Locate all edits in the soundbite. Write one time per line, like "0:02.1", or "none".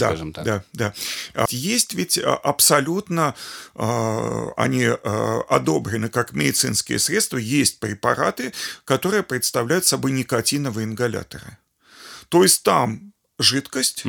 0:01.5